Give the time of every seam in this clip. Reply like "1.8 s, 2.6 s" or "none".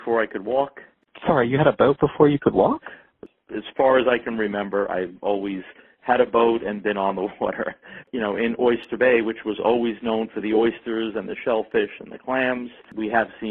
8.0 s